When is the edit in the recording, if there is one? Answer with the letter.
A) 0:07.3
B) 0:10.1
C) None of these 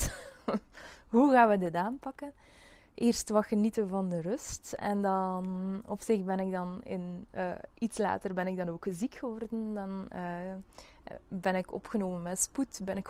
C